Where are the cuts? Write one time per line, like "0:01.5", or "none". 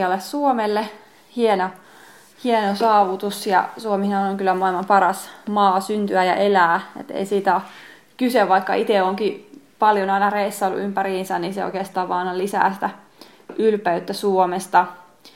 none